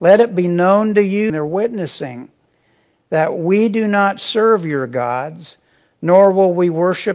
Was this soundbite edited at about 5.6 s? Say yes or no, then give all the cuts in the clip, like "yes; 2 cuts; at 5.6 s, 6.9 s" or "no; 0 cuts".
no; 1 cut; at 1.3 s